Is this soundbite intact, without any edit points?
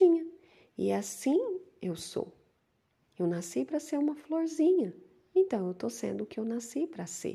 yes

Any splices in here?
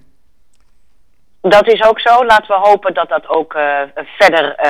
no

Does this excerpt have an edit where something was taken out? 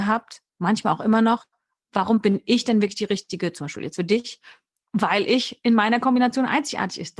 no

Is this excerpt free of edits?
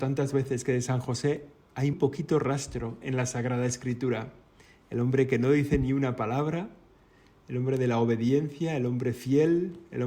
no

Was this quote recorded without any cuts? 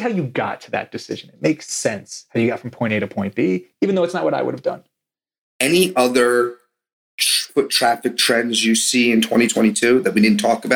no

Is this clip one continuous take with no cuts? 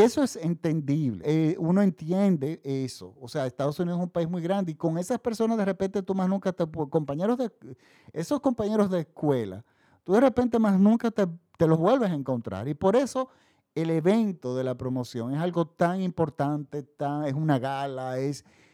no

